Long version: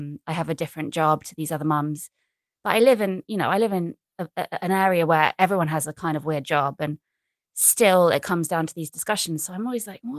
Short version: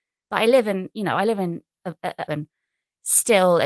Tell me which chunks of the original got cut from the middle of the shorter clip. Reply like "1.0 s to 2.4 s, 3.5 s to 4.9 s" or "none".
4.6 s to 6.8 s